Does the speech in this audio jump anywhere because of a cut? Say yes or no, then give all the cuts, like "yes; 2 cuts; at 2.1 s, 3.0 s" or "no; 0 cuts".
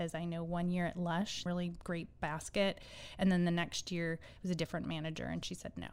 yes; 1 cut; at 1.5 s